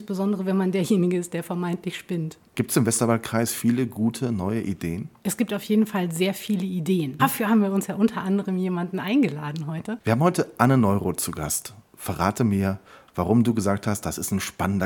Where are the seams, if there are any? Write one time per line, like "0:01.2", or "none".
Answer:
0:07.2
0:10.0